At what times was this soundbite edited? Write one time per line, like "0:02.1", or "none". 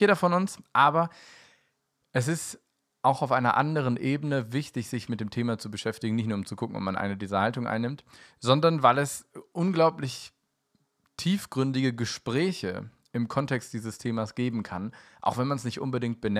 none